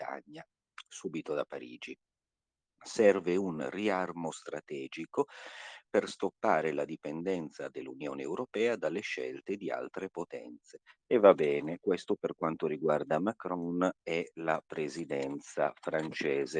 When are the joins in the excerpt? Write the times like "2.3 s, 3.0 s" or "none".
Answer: 11.1 s

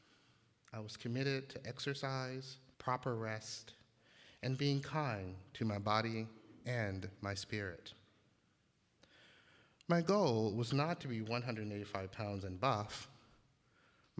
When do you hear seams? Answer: 2.7 s

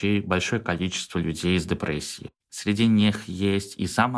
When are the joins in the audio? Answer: 2.5 s

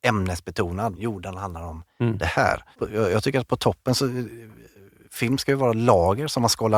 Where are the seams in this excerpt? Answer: 1.0 s, 2.7 s

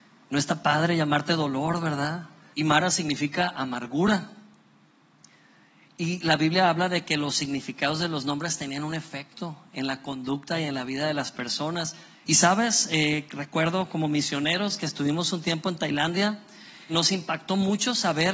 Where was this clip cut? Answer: 2.5 s, 12.2 s, 16.9 s

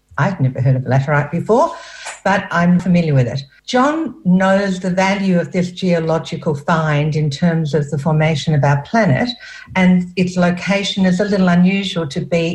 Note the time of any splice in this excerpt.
2.8 s

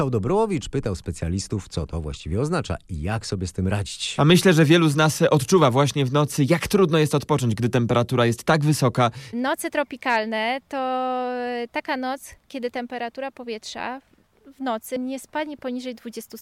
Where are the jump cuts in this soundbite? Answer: 9.3 s

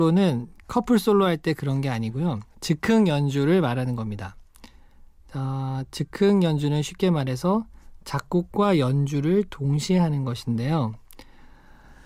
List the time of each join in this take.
2.5 s

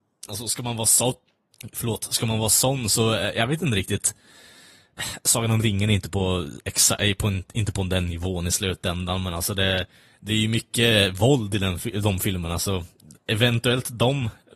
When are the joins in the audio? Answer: none

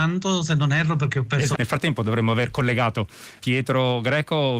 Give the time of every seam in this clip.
1.5 s, 3.4 s

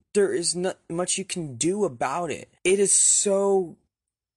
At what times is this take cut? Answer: 2.6 s

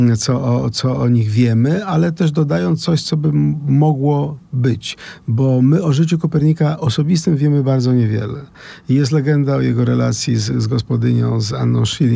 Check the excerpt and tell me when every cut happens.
none

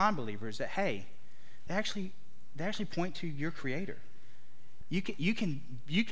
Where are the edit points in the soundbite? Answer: 1.7 s, 4.8 s

